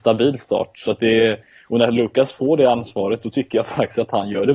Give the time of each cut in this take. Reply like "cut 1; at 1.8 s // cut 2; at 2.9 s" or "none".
none